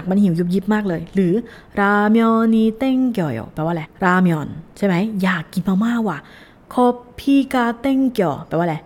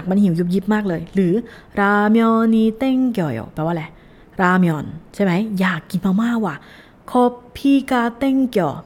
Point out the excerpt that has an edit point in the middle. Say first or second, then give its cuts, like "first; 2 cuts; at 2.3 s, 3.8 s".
first; 1 cut; at 3.8 s